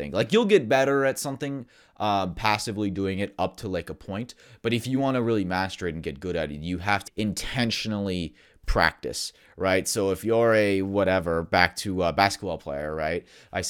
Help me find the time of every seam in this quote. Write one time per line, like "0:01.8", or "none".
0:07.1

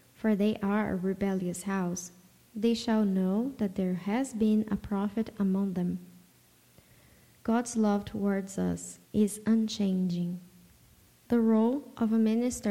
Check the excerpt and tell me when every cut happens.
0:07.3
0:09.0
0:11.2

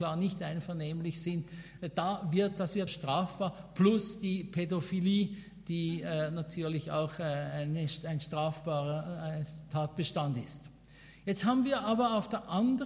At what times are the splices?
0:02.9

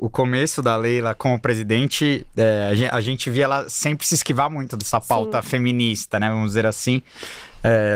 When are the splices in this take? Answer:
none

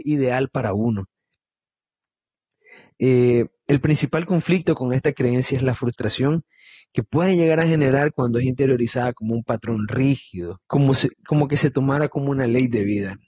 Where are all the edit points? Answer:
0:10.6

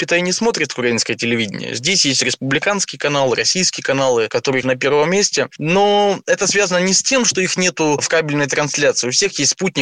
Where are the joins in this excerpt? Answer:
0:04.6

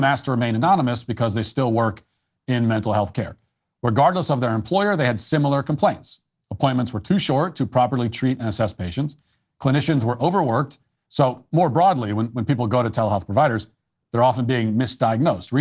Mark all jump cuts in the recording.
0:11.1

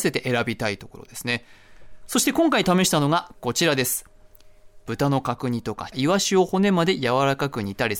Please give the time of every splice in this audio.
0:02.1
0:04.9
0:05.9

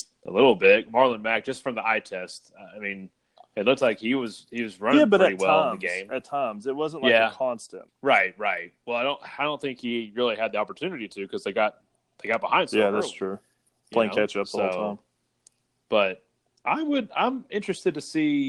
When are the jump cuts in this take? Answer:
0:07.9

